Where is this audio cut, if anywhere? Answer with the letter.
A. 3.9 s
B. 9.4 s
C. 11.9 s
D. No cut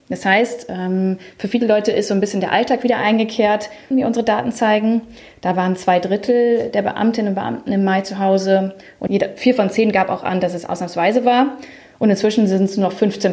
A